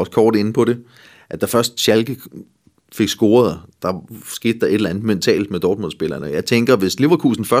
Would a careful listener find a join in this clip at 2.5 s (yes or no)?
no